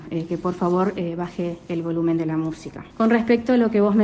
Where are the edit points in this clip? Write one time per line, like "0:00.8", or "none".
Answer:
0:02.9